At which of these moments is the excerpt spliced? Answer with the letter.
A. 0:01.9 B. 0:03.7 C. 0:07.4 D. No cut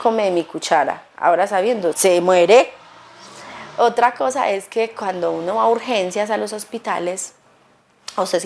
A